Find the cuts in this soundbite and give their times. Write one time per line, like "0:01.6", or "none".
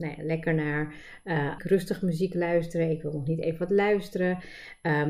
0:01.6

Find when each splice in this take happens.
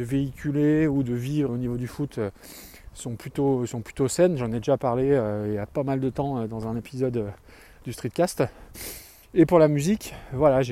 0:01.5

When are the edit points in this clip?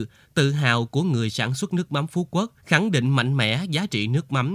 0:02.6

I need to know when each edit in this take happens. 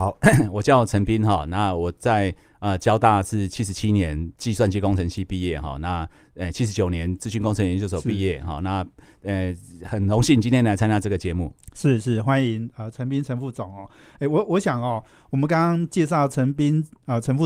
none

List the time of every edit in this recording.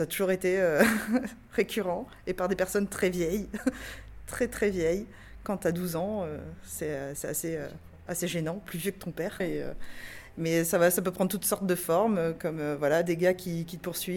0:09.4

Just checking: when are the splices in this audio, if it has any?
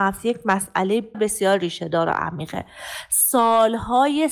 0:01.1

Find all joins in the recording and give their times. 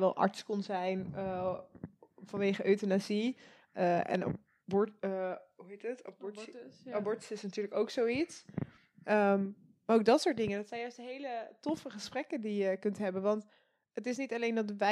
none

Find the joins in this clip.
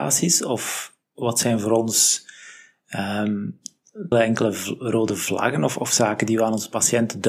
0:01.0
0:04.1

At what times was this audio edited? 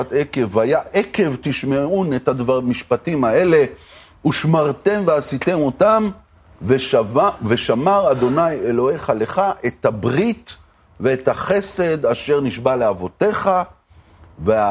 none

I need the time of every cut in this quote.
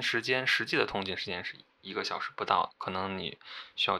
0:02.7

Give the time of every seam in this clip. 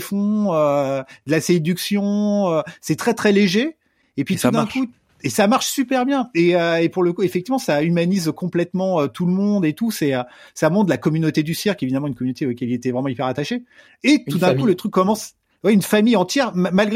none

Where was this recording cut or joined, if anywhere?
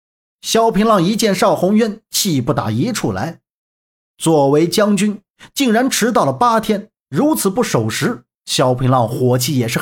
none

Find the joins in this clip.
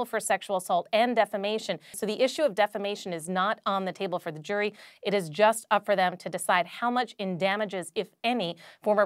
0:01.9

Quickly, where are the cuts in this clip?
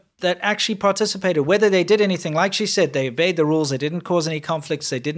none

